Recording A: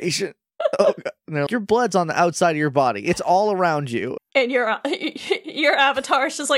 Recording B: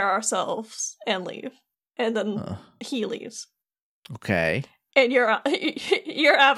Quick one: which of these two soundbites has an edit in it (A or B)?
A